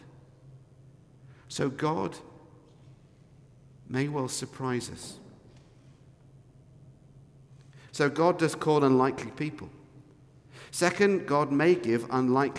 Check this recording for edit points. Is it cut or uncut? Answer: cut